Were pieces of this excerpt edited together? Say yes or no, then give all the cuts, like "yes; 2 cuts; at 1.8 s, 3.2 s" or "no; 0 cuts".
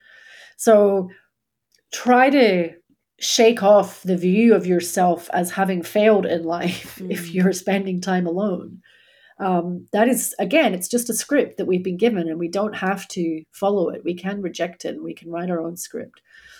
no; 0 cuts